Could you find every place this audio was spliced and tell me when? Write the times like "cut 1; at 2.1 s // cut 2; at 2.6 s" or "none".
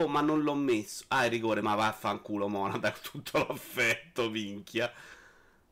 none